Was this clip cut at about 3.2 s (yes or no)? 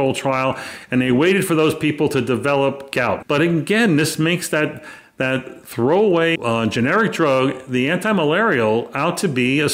yes